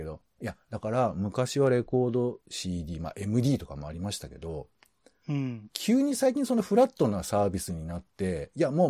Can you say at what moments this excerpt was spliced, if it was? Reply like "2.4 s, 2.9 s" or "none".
2.4 s